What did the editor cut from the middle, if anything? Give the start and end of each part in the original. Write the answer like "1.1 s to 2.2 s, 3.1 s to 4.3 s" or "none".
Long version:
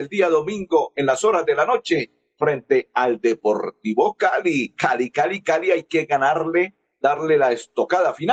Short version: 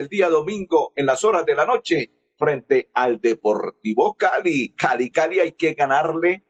5.1 s to 5.4 s